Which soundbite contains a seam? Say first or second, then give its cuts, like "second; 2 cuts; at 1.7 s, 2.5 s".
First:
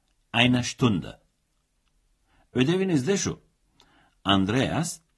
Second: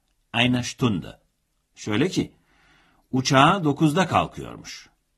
second; 1 cut; at 1.7 s